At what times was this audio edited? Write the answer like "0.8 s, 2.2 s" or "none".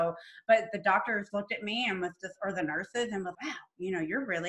1.3 s, 3.3 s

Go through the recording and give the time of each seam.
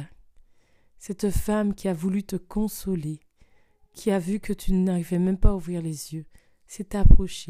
none

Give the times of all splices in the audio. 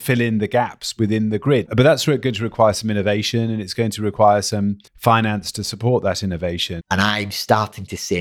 1.7 s, 4.9 s, 6.8 s

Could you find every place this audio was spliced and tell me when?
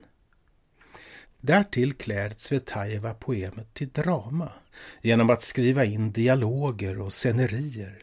1.2 s

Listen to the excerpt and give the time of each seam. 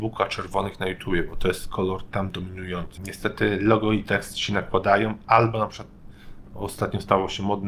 3.0 s

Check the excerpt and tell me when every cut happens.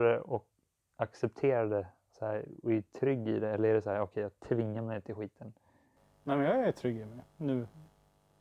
none

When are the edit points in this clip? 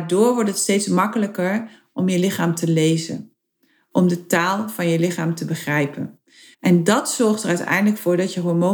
6.5 s

